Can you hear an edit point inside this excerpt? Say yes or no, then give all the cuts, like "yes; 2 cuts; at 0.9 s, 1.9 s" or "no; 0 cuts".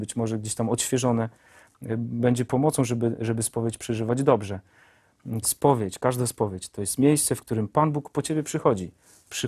yes; 1 cut; at 5.4 s